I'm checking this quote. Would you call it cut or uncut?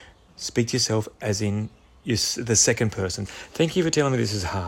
cut